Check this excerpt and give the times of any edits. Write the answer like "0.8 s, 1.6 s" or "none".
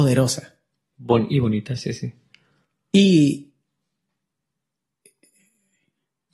none